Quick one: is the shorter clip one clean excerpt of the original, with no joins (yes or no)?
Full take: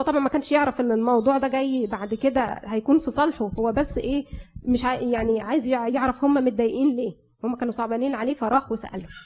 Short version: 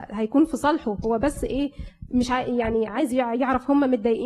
yes